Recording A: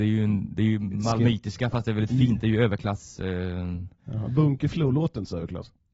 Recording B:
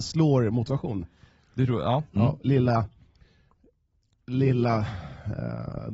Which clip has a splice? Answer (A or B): B